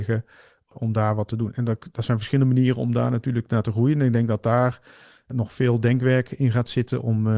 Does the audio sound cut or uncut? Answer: uncut